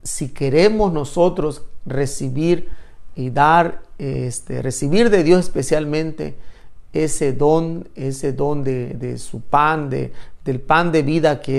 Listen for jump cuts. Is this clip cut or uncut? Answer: uncut